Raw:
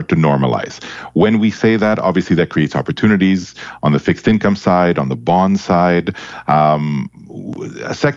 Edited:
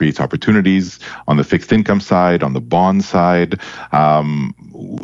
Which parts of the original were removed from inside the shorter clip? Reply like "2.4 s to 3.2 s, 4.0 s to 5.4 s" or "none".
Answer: none